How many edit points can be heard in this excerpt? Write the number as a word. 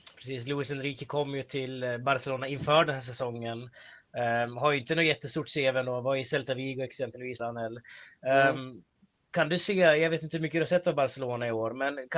one